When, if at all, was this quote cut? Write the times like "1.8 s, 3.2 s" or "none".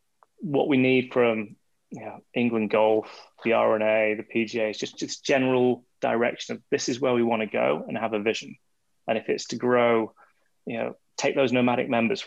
none